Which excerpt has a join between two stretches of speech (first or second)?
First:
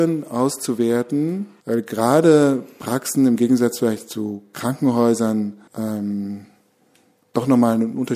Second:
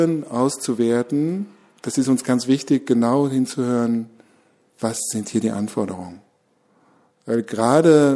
first